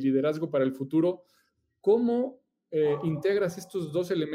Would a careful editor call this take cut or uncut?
uncut